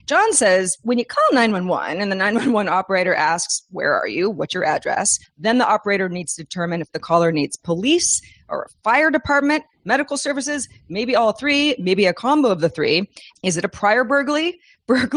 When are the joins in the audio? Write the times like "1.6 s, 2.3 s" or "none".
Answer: 5.2 s, 13.3 s